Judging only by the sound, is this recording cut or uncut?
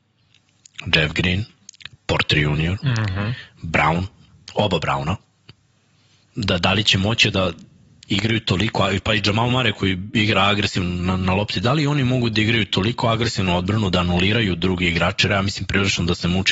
cut